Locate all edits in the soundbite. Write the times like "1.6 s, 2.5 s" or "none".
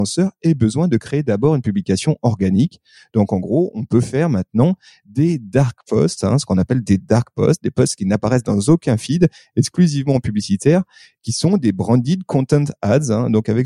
none